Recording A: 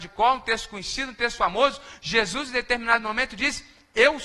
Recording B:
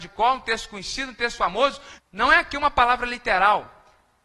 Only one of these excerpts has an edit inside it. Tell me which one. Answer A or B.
B